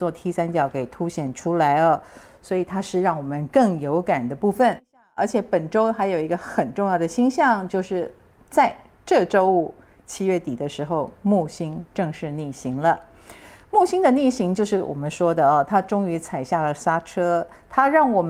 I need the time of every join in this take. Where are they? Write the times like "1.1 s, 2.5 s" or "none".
none